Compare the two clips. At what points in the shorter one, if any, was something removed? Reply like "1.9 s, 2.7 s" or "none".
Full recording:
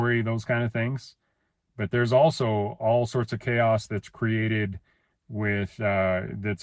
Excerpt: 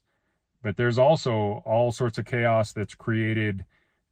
none